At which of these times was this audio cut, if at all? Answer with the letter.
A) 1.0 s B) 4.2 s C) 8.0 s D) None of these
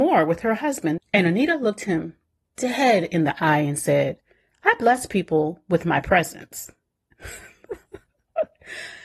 A